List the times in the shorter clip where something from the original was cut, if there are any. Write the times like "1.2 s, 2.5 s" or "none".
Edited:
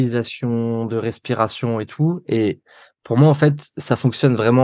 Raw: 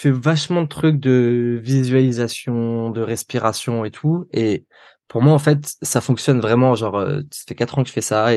none